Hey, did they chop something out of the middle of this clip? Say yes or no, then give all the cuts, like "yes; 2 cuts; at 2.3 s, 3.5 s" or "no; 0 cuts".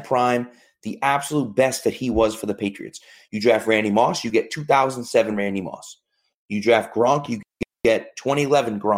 no; 0 cuts